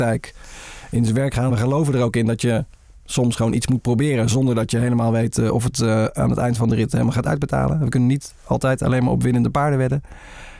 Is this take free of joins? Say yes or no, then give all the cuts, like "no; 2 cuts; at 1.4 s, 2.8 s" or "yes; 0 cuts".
yes; 0 cuts